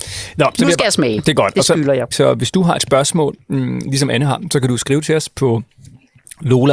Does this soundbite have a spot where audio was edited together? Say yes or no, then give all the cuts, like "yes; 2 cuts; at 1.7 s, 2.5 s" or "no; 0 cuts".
yes; 1 cut; at 2.1 s